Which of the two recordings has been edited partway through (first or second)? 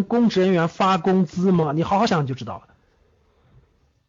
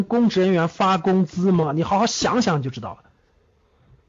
first